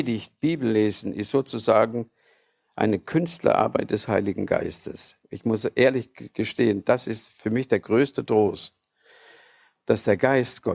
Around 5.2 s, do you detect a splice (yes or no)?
no